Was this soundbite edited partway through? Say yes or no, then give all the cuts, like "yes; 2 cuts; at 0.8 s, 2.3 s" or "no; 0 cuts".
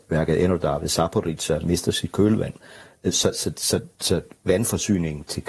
no; 0 cuts